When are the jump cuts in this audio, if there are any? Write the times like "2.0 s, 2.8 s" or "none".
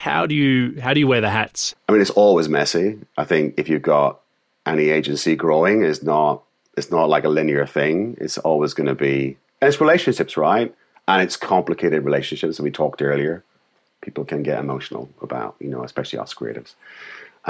1.7 s

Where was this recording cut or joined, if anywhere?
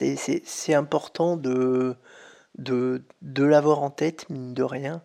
none

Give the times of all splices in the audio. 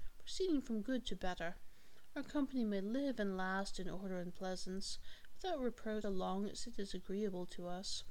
6.0 s

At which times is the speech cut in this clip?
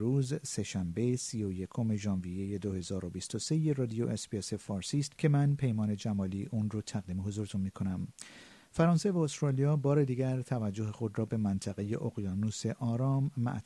5.2 s

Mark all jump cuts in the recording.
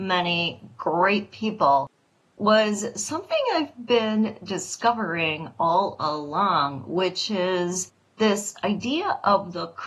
none

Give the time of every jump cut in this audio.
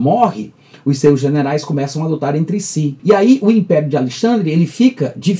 3.0 s

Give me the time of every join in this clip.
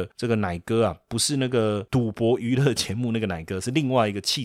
none

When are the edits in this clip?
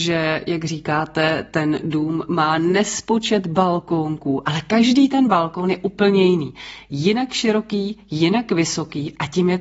none

